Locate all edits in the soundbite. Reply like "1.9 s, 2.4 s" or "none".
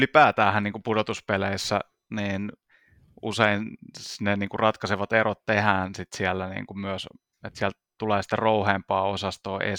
none